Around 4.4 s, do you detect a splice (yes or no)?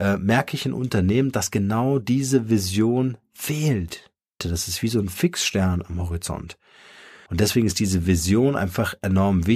yes